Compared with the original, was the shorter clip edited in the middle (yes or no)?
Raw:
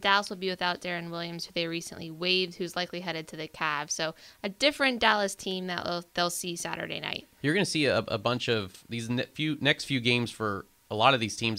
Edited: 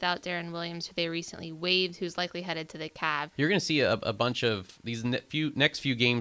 yes